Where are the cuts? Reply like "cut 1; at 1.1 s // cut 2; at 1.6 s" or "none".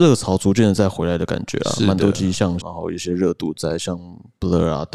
cut 1; at 2.6 s

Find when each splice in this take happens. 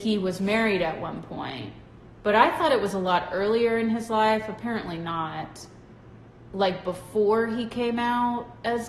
none

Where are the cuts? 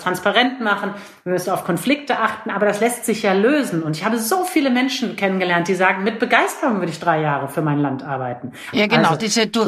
cut 1; at 8.7 s

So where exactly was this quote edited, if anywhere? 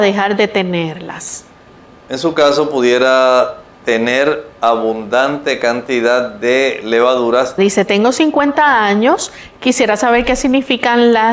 cut 1; at 7.6 s

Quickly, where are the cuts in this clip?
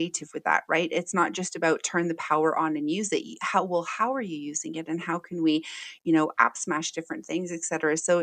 none

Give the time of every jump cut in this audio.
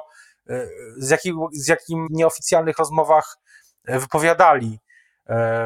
cut 1; at 2.1 s

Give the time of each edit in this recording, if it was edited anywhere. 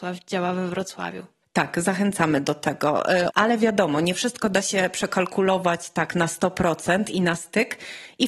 cut 1; at 1.4 s // cut 2; at 3.3 s

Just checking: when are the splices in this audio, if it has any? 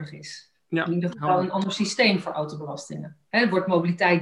none

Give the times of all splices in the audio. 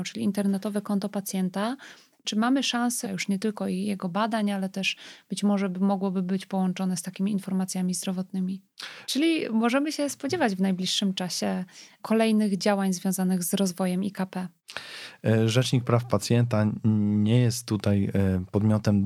cut 1; at 3.0 s // cut 2; at 9.0 s

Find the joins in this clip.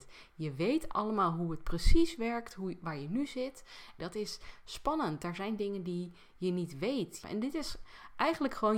cut 1; at 4.0 s // cut 2; at 7.2 s

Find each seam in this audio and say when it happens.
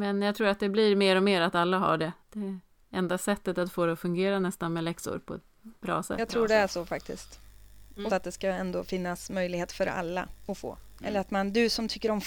cut 1; at 8.1 s // cut 2; at 11.0 s

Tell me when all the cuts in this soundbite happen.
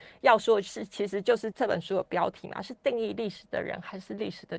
cut 1; at 1.5 s

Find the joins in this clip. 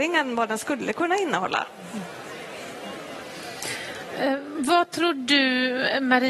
none

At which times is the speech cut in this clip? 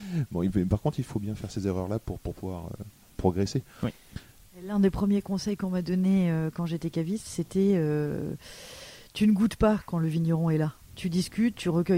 cut 1; at 1.1 s

